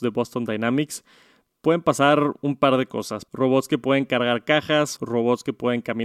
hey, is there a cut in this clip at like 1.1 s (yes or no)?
no